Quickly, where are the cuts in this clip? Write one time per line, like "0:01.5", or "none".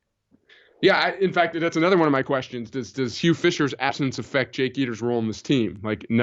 none